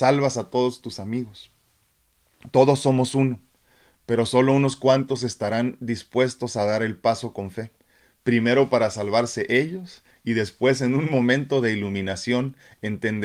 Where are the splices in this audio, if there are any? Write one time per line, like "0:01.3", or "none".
none